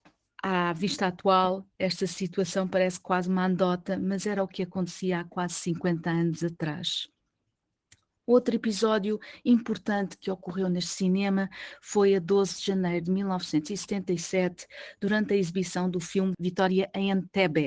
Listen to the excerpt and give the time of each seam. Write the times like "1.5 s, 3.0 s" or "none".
16.3 s